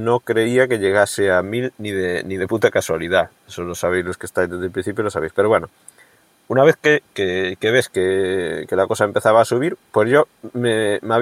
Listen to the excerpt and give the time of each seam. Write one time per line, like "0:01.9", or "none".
none